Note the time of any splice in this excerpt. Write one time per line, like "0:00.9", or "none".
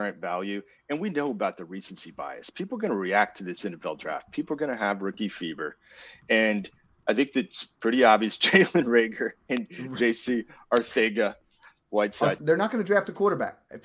0:09.4
0:12.4